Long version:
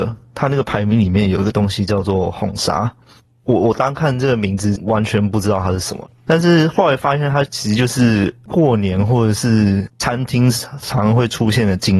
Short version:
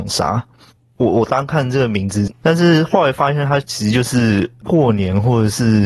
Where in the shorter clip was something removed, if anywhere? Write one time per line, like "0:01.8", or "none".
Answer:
0:02.3